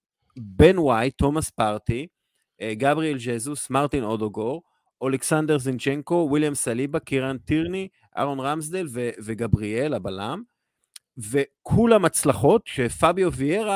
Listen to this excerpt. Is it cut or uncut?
uncut